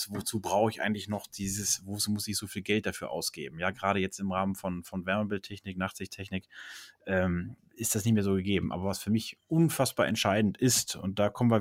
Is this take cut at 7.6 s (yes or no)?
yes